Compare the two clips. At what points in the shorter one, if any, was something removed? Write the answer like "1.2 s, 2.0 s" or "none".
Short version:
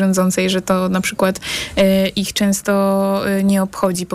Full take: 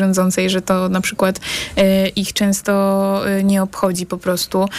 none